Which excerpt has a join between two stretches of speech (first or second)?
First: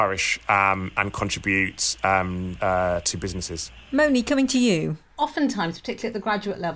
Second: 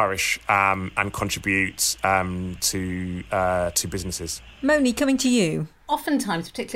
first